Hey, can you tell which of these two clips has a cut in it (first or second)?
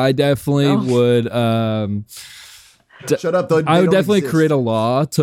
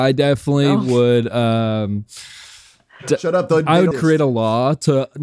second